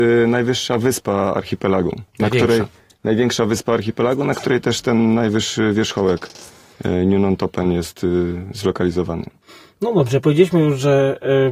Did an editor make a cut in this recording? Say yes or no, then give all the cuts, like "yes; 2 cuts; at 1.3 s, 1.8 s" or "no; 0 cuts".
no; 0 cuts